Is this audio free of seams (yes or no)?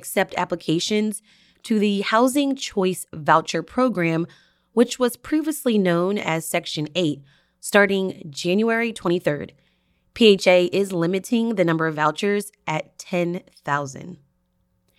yes